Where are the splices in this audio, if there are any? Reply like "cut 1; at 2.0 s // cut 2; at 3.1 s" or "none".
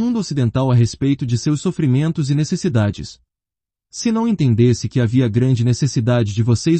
cut 1; at 3.7 s